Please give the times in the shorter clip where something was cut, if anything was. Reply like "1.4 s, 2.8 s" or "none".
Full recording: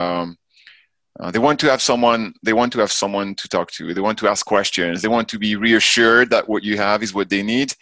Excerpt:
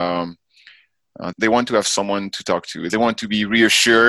1.3 s, 2.9 s